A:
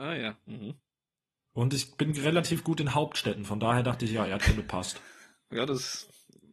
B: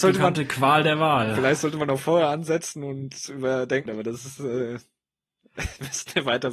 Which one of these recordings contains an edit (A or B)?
B